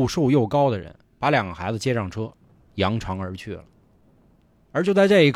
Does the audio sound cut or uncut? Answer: uncut